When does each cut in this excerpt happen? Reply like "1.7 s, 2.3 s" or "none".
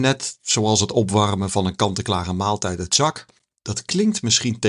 3.6 s